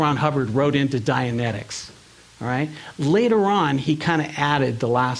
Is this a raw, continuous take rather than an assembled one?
yes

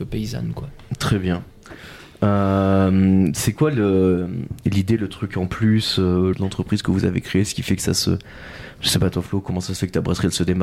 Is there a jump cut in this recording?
yes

